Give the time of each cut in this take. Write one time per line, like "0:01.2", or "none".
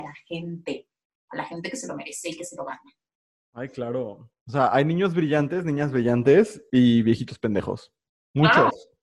none